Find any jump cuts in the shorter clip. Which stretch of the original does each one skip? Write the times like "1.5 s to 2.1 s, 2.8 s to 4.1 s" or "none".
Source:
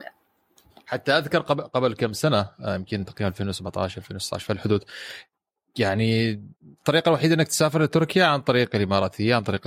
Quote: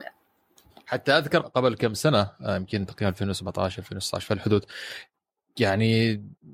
1.4 s to 1.6 s